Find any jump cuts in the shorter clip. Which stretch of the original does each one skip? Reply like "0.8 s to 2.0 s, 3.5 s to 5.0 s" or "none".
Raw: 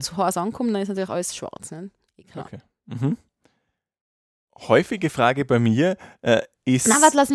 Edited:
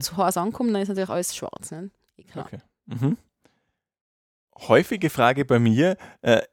none